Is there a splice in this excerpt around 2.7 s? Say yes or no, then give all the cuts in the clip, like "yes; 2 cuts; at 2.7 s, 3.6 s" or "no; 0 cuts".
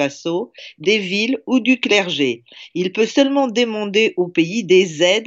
yes; 1 cut; at 2.7 s